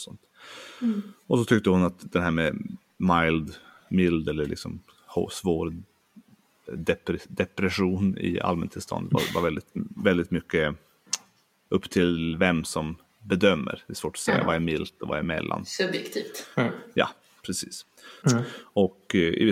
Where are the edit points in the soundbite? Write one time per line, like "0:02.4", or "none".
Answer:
0:18.2

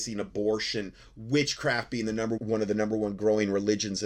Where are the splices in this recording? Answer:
0:02.4

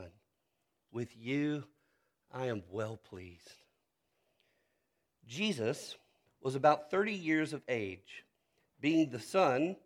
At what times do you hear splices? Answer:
0:06.3

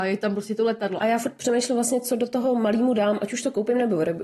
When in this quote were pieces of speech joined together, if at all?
0:01.0

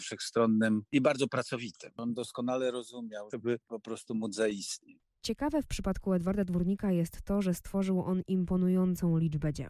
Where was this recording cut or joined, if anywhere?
0:03.3

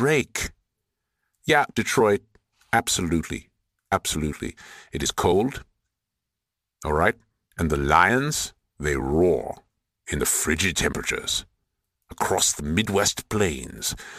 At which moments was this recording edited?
0:01.7
0:04.9

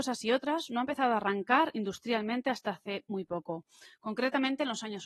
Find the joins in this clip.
none

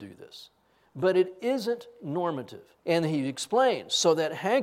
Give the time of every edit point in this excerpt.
0:02.8

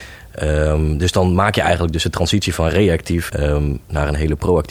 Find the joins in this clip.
0:03.3

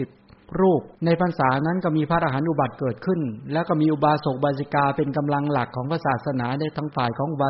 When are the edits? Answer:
0:00.9

